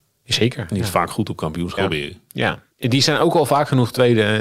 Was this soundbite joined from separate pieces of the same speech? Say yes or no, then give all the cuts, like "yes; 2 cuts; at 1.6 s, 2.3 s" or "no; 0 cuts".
yes; 1 cut; at 1.8 s